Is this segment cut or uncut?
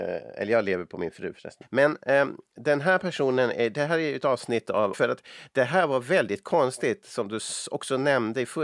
cut